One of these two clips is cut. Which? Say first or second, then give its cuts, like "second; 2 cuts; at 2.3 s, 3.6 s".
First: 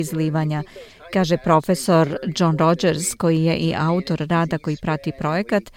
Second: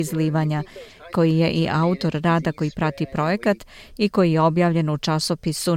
second; 1 cut; at 1.1 s